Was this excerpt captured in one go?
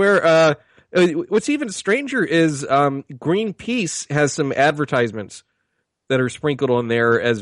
yes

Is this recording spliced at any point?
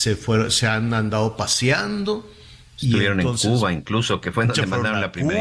no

